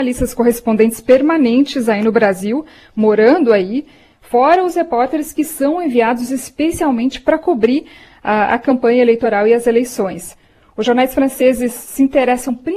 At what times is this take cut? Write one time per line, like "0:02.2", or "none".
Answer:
none